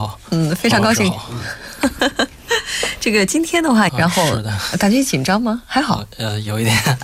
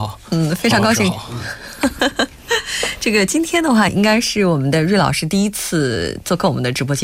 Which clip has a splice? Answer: first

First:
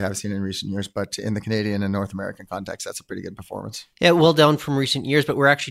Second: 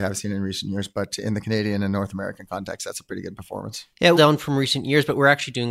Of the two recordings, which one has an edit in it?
second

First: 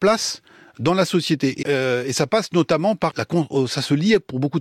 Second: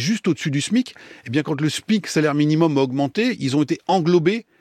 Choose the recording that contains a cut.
first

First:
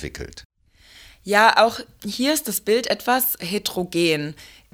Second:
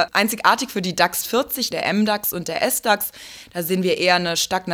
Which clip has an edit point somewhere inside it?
second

